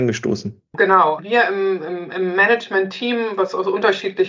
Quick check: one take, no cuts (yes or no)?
no